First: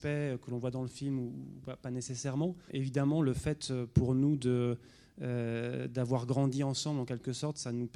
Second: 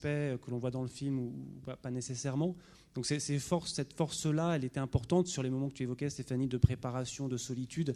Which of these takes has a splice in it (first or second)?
first